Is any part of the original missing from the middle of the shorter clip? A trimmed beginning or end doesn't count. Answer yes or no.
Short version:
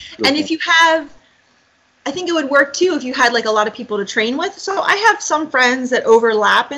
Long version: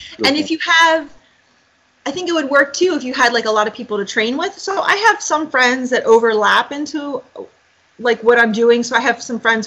no